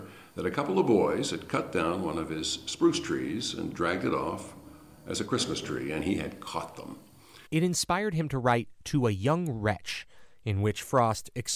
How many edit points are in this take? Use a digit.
1